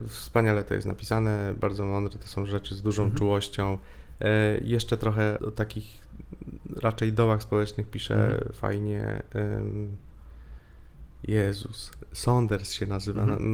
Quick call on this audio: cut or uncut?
cut